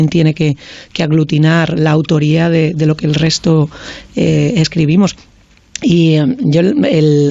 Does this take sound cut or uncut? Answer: uncut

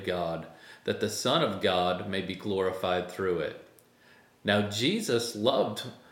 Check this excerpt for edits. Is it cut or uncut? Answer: uncut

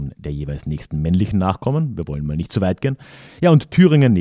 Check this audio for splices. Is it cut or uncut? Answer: uncut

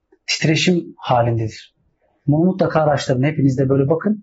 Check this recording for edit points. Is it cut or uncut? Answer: uncut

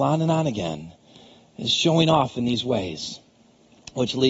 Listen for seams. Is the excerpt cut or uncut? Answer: uncut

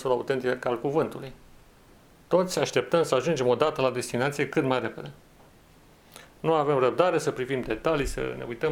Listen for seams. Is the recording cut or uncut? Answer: uncut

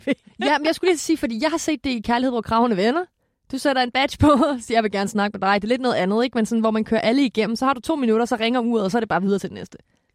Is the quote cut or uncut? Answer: uncut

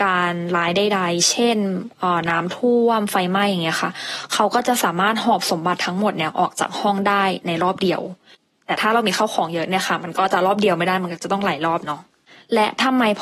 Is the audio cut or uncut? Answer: uncut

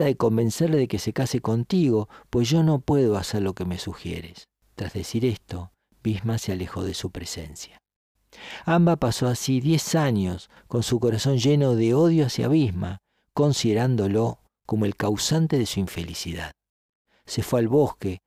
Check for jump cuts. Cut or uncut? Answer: uncut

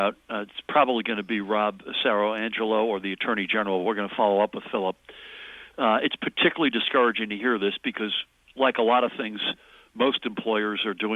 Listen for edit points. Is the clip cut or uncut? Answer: uncut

